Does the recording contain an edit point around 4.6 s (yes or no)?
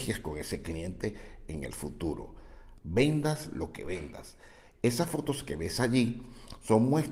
no